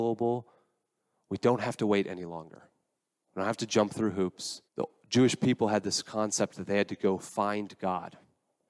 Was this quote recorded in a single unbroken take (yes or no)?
no